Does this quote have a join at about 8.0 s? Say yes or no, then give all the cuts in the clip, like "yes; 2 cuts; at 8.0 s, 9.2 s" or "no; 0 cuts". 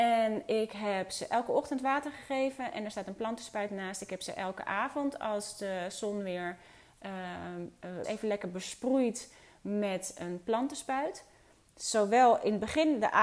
yes; 1 cut; at 8.0 s